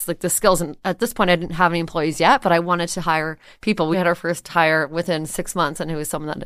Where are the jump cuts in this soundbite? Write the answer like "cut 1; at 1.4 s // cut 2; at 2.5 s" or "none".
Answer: cut 1; at 3.9 s